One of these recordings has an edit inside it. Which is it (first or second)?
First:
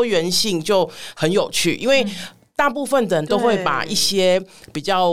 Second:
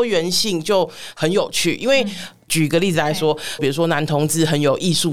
second